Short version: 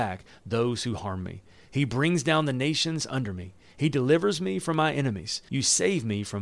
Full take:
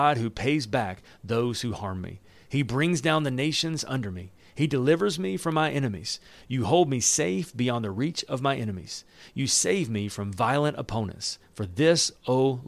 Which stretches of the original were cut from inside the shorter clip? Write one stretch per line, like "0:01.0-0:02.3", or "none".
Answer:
0:06.3-0:09.3